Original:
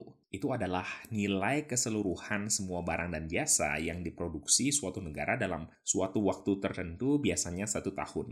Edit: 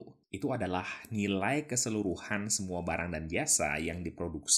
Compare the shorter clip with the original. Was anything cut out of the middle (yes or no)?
no